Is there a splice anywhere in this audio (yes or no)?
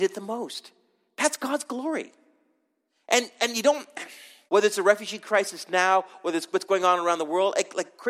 yes